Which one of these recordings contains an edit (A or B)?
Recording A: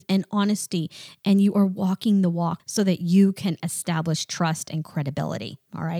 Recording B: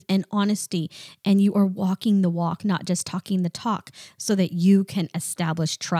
A